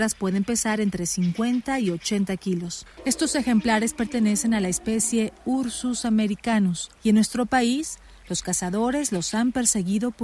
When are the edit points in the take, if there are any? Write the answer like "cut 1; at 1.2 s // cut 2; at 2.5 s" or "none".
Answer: cut 1; at 3.0 s // cut 2; at 7.0 s